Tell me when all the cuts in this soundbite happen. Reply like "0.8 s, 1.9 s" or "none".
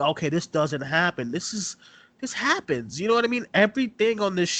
none